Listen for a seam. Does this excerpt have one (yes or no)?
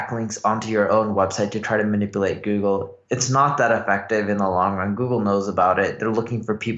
no